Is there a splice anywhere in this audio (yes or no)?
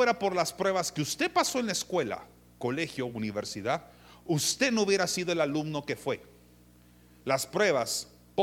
no